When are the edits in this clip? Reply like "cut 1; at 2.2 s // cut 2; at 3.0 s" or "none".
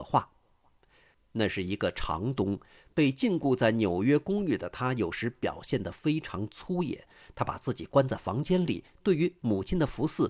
cut 1; at 1.1 s